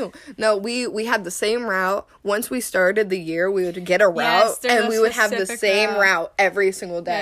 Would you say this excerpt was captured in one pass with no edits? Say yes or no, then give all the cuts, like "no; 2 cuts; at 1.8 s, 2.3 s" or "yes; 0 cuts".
yes; 0 cuts